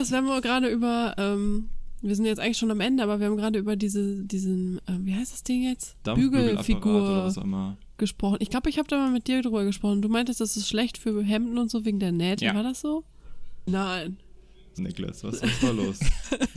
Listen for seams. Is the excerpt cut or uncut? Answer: cut